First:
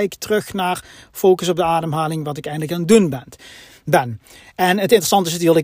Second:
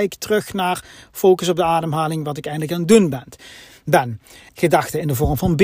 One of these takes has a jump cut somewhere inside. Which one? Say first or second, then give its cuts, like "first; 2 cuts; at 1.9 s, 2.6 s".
second; 1 cut; at 4.5 s